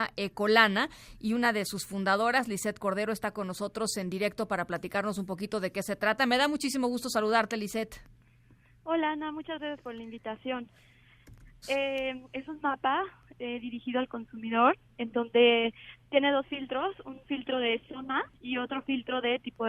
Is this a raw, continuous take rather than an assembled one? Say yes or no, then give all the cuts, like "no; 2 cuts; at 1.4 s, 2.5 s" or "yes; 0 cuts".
no; 2 cuts; at 11.6 s, 18.3 s